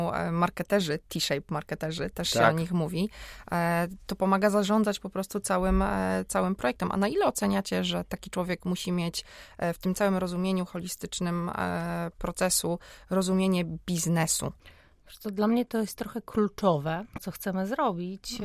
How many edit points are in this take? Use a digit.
1